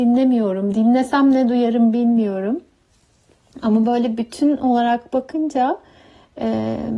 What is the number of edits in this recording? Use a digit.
0